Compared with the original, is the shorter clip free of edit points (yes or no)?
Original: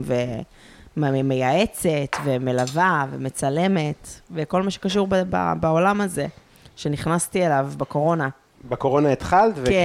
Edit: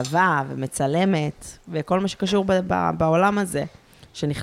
yes